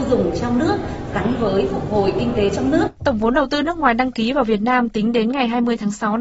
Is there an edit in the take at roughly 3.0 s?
yes; 1 cut; at 3.0 s

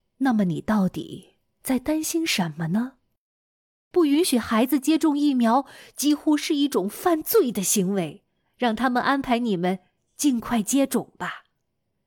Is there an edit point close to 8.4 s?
yes; 1 cut; at 8.4 s

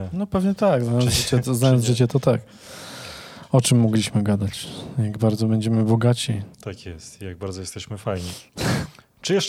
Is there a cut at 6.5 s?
yes; 1 cut; at 6.5 s

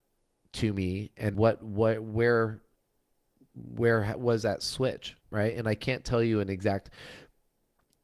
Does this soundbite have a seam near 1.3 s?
yes; 2 cuts; at 1.3 s, 5.2 s

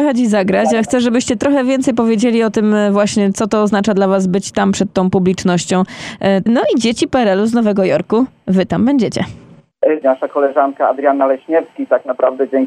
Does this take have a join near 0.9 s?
no; 2 cuts; at 6.5 s, 10.0 s

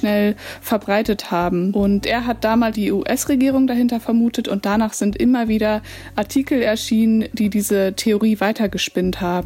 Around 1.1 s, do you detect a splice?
no; 1 cut; at 2.7 s

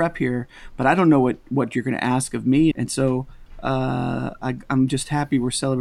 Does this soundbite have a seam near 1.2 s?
no; 1 cut; at 2.7 s

